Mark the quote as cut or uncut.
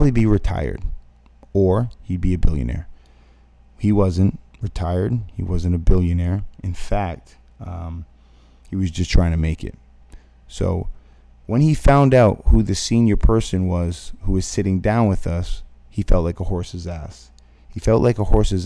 uncut